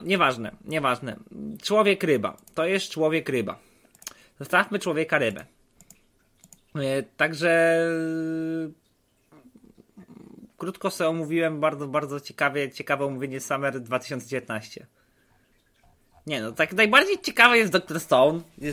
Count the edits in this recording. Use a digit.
0